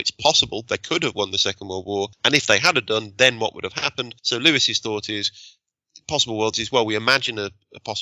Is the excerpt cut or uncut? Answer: uncut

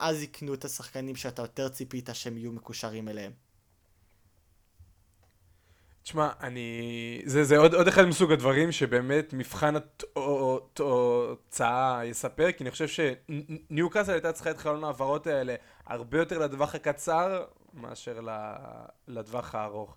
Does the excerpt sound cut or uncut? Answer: uncut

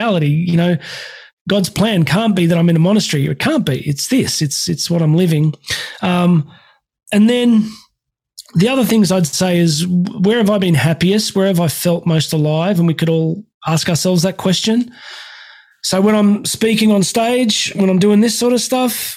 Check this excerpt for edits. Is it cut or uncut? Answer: uncut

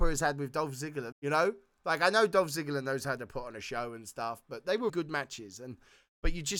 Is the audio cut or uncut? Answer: cut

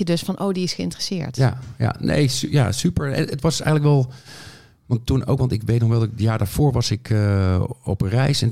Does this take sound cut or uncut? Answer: uncut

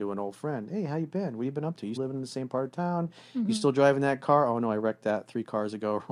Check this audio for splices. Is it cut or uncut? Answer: cut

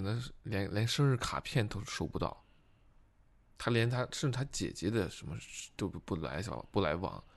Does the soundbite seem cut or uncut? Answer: uncut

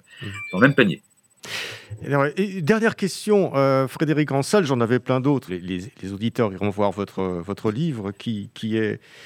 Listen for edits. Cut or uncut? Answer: cut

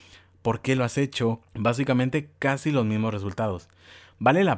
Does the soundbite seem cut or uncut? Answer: cut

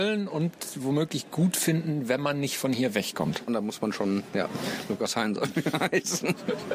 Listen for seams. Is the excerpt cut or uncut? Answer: cut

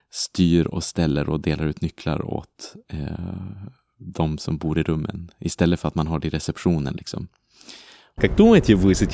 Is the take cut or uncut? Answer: cut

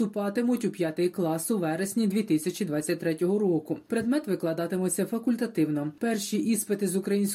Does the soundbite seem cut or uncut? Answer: uncut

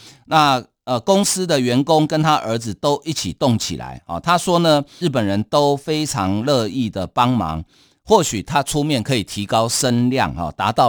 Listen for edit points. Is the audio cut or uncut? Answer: cut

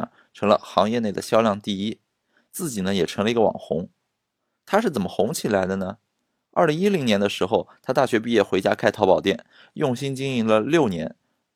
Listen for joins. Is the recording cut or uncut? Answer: uncut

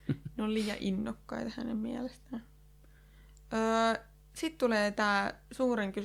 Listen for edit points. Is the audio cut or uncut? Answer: uncut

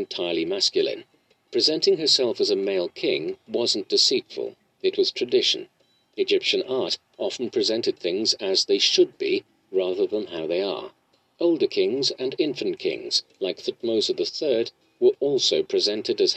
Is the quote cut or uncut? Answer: uncut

